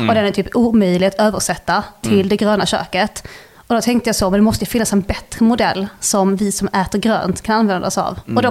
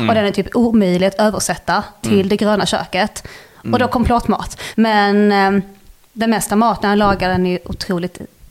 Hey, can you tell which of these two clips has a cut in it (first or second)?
second